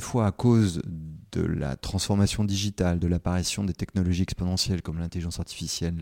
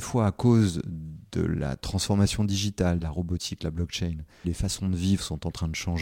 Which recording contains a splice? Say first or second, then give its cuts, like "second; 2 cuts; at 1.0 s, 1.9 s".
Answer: second; 2 cuts; at 3.0 s, 4.4 s